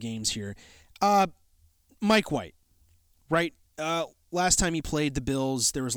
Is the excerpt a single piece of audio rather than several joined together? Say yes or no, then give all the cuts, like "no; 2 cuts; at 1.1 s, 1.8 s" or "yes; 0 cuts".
yes; 0 cuts